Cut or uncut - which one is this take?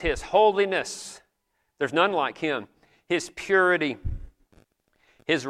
uncut